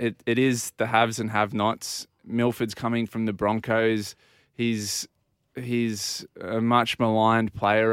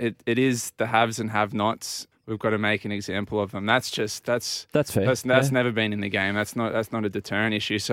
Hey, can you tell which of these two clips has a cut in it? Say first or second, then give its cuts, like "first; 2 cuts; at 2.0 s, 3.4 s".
second; 1 cut; at 2.1 s